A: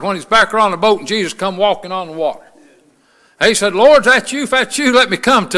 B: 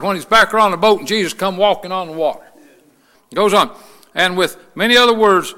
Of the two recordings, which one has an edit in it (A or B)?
B